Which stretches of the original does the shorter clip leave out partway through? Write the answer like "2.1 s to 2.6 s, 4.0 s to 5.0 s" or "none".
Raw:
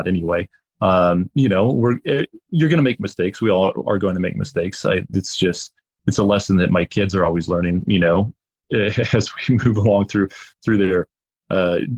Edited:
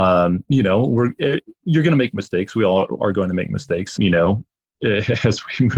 4.8 s to 7.9 s